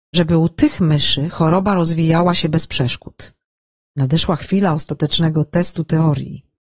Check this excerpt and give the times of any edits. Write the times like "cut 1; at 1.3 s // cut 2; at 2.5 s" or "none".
cut 1; at 3.8 s